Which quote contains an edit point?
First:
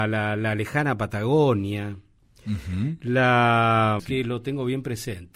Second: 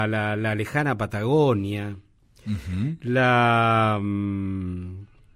first; 1 cut; at 4.0 s

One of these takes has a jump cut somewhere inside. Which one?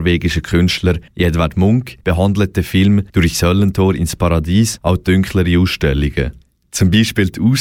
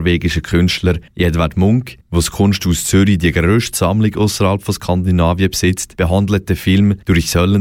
first; 1 cut; at 2.0 s

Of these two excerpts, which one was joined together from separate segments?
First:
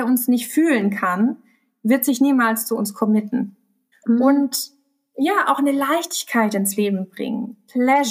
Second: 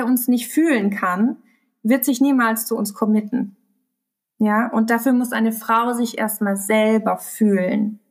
first; 1 cut; at 3.9 s

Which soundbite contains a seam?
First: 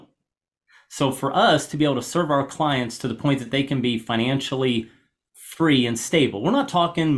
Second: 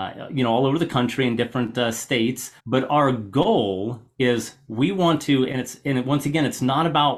second; 1 cut; at 2.6 s

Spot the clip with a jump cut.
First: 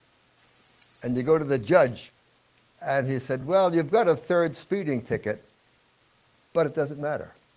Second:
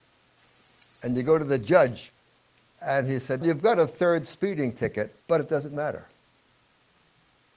second; 2 cuts; at 3.4 s, 5.2 s

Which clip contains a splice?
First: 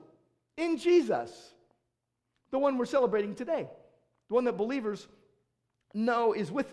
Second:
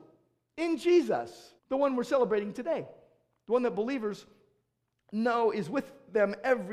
second; 1 cut; at 1.6 s

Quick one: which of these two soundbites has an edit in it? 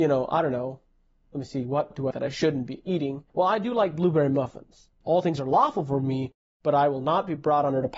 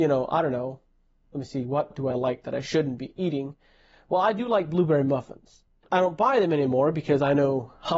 first; 3 cuts; at 2.1 s, 3.3 s, 5.0 s

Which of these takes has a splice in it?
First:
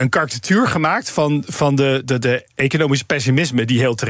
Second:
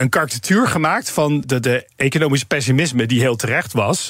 second; 1 cut; at 1.4 s

